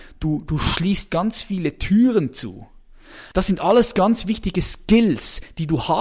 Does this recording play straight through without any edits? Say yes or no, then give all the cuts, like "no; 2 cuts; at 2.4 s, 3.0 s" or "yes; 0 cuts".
no; 1 cut; at 3.3 s